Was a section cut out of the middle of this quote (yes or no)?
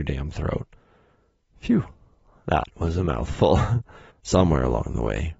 yes